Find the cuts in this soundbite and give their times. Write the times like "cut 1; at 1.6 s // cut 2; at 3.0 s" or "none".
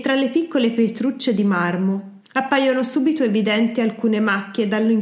cut 1; at 2.2 s